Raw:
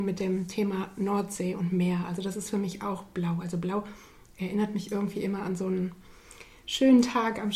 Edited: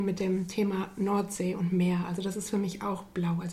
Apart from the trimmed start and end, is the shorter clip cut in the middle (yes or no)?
no